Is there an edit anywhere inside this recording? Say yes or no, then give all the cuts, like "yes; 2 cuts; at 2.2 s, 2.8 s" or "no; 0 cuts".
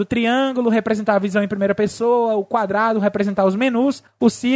no; 0 cuts